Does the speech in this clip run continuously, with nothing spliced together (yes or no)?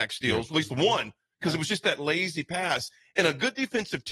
yes